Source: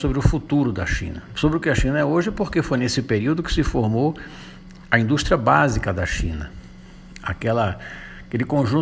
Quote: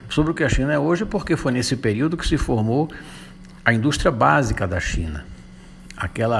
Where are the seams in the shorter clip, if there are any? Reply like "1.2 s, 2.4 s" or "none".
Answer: none